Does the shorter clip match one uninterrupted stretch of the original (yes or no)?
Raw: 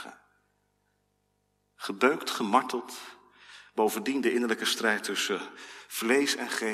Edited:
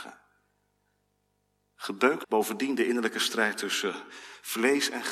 no